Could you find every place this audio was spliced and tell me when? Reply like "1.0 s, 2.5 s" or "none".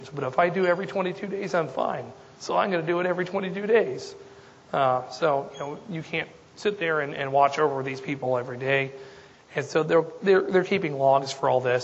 9.3 s